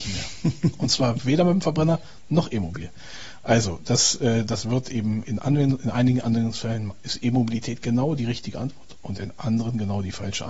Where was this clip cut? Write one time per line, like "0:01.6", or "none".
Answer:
none